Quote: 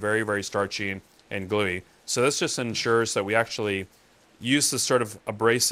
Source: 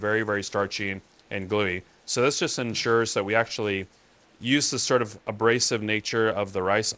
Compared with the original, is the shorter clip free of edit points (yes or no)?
yes